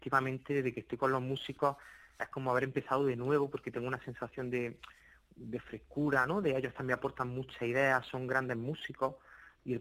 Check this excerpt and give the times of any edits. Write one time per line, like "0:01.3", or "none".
none